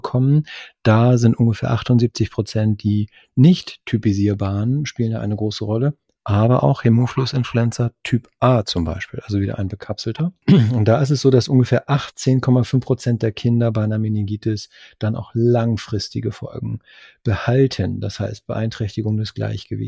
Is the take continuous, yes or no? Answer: yes